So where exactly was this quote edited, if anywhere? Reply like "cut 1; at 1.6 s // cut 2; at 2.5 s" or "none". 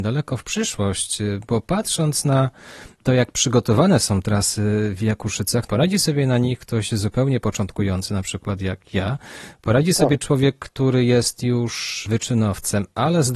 none